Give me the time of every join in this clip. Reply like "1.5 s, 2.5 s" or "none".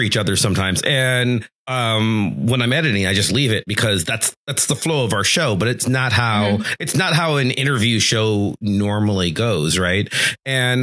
none